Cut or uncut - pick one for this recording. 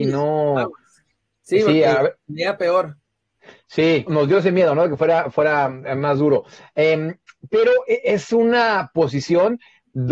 cut